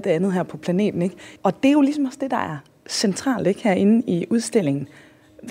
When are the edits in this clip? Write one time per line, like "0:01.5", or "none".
0:01.4